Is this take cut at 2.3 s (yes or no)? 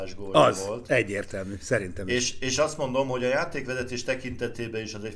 no